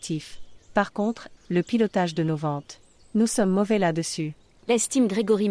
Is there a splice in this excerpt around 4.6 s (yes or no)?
no